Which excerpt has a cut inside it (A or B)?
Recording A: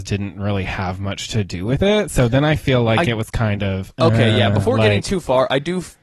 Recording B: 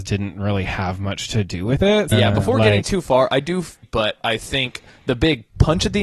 B